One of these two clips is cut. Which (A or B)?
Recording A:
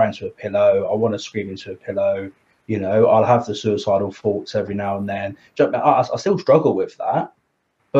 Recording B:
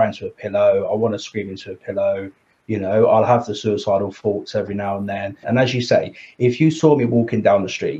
B